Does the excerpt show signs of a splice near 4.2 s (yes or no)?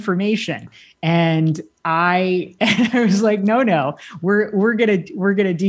no